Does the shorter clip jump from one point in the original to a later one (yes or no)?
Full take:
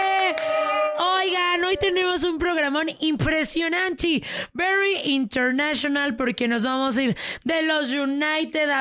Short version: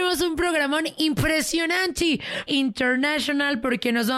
yes